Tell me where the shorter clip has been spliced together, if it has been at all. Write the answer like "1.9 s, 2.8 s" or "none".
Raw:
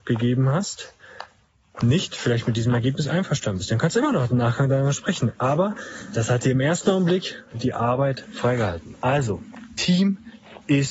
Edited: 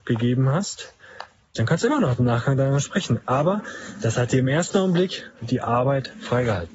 1.5 s